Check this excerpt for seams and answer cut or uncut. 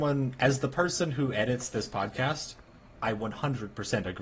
uncut